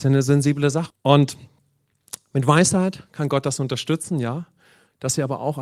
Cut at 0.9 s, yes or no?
yes